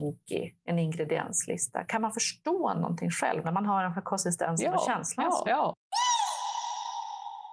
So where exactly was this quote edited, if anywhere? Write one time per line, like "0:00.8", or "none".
0:03.4
0:05.4